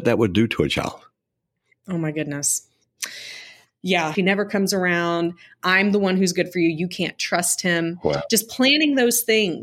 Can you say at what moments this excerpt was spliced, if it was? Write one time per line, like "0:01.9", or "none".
0:04.1